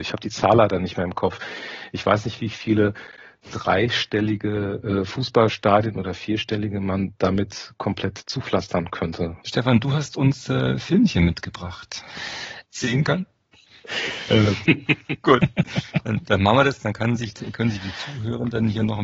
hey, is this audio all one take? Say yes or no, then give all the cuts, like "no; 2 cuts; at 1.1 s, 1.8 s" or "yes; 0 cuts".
no; 3 cuts; at 9.4 s, 12.6 s, 14.7 s